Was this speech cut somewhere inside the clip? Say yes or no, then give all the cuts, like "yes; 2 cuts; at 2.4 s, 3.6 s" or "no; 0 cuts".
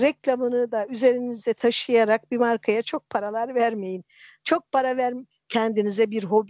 yes; 1 cut; at 5.3 s